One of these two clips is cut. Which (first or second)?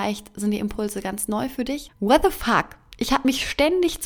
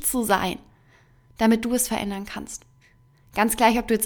first